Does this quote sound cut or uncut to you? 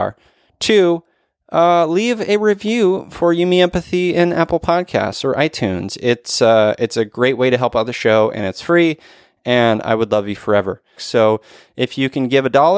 cut